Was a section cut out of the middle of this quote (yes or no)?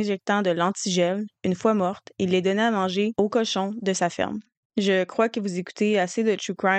yes